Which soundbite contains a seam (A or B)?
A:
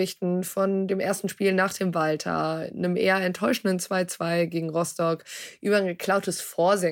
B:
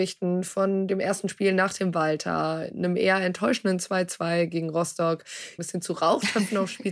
B